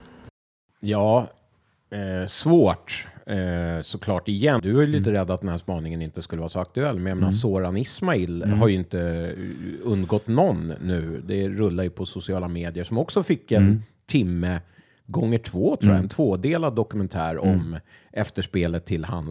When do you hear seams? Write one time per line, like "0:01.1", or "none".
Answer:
0:04.6